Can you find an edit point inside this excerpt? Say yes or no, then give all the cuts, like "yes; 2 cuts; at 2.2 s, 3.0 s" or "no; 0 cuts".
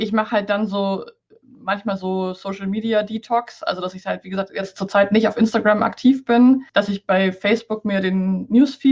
yes; 1 cut; at 6.7 s